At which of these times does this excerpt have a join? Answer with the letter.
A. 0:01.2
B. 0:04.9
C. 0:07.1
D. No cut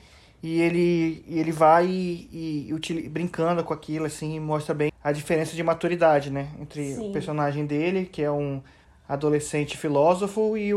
B